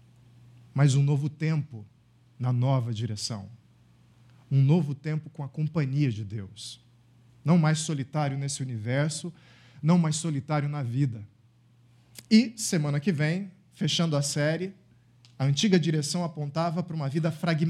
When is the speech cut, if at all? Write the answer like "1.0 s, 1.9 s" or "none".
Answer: none